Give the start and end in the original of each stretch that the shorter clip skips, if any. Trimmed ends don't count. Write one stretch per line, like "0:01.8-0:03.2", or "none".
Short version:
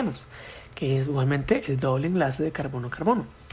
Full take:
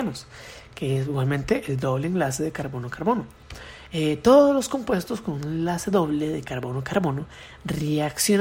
none